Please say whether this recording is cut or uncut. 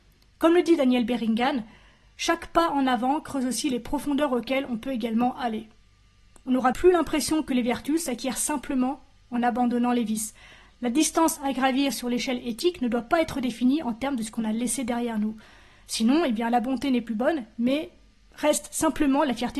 cut